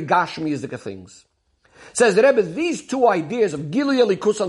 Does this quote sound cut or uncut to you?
uncut